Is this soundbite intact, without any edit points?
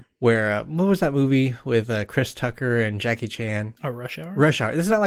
no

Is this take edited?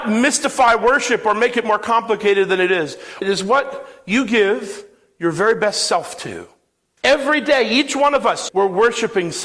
yes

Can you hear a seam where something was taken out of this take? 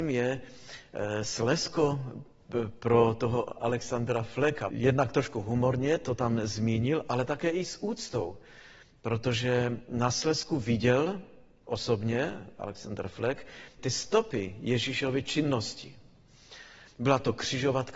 yes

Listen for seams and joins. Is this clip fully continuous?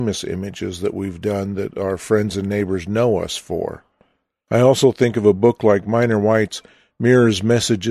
yes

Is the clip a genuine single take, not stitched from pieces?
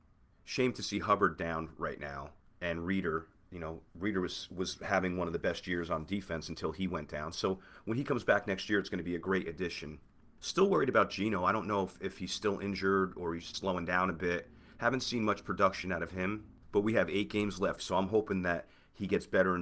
no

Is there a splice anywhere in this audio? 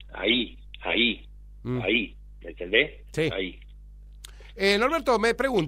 no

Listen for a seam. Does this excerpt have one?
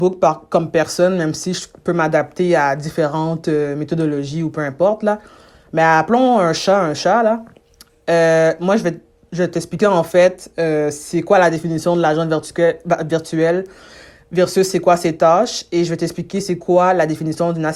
no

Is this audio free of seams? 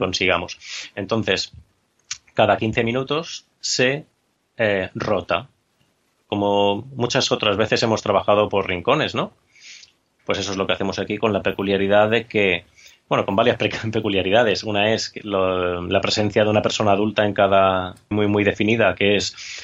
no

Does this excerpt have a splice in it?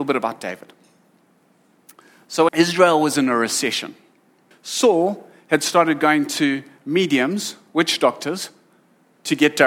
yes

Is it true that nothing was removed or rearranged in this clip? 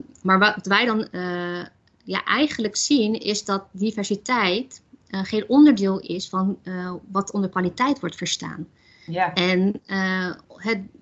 yes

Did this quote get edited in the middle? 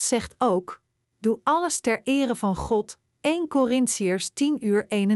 yes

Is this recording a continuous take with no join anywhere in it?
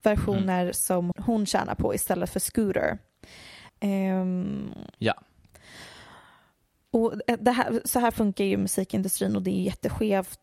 no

